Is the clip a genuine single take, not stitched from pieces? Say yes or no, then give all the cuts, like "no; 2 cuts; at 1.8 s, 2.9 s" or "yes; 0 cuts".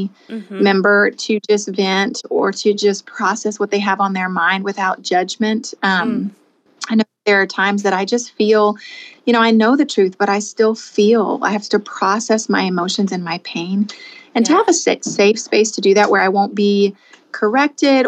yes; 0 cuts